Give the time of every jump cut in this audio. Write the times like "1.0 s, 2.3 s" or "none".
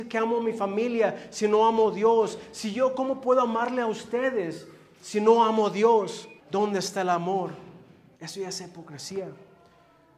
6.4 s, 8.2 s